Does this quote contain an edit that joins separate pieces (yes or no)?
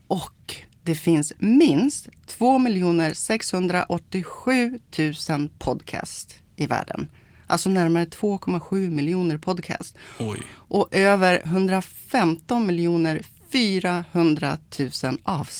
no